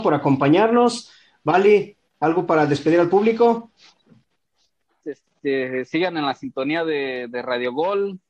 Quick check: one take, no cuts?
no; 1 cut; at 5.0 s

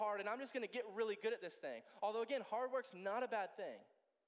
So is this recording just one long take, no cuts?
yes; 0 cuts

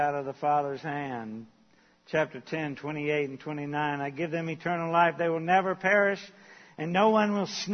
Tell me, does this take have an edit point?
no; 0 cuts

